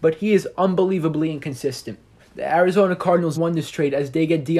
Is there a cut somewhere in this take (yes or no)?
yes